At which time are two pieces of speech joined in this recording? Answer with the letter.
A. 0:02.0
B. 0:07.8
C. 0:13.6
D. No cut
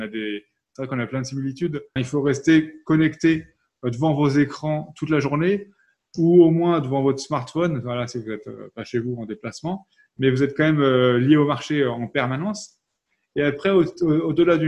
A